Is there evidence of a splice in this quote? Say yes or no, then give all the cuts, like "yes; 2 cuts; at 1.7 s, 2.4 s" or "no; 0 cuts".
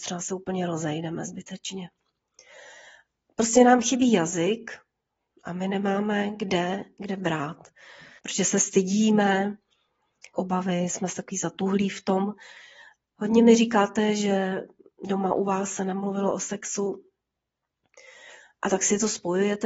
yes; 3 cuts; at 8.2 s, 10.3 s, 13.2 s